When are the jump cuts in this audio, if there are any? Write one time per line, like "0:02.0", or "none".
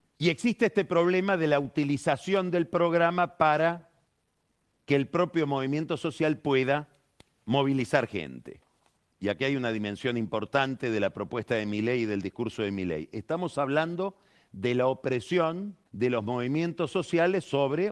0:09.0
0:15.9